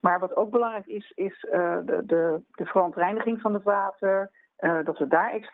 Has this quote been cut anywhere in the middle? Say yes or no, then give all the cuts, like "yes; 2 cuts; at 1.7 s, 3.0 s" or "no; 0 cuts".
no; 0 cuts